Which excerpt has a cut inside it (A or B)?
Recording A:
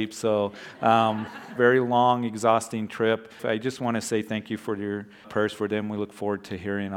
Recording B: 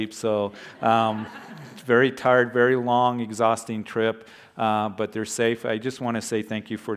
A